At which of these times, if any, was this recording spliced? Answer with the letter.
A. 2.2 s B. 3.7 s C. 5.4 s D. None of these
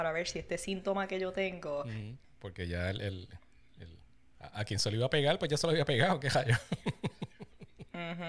A